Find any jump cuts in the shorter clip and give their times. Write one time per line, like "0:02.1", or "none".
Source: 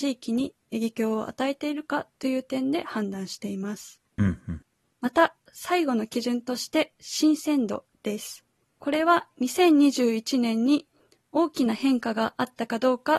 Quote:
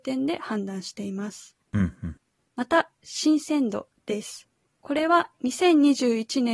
0:03.0